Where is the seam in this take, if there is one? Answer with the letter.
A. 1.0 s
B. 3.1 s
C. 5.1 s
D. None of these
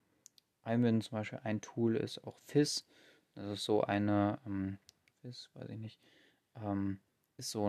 C